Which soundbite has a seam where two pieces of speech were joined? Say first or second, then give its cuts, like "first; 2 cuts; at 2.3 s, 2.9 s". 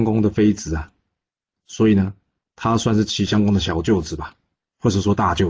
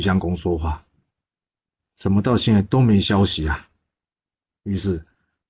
second; 1 cut; at 1.8 s